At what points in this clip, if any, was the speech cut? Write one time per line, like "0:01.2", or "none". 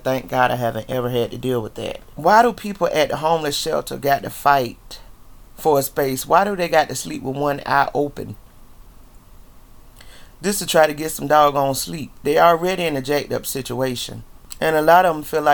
none